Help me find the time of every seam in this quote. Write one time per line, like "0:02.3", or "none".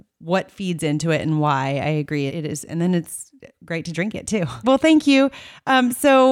0:02.3
0:04.6